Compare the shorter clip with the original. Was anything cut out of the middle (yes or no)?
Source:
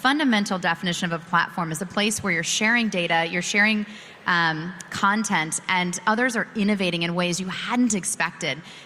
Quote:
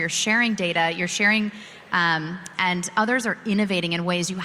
yes